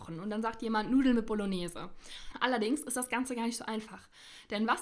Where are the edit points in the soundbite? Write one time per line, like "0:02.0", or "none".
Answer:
0:02.3